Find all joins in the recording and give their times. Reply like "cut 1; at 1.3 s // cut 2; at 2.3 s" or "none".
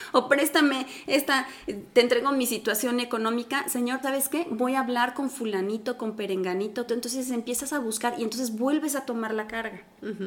cut 1; at 4.0 s // cut 2; at 6.9 s